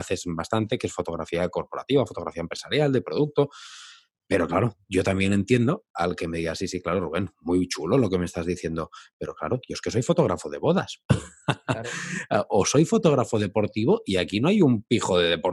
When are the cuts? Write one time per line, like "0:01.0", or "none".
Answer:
none